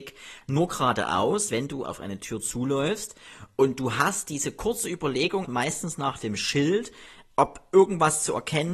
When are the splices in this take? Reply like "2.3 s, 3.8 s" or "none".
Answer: 1.8 s, 5.4 s